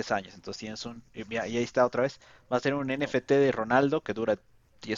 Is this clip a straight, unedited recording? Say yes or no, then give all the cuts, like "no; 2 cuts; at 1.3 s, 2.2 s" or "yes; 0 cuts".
yes; 0 cuts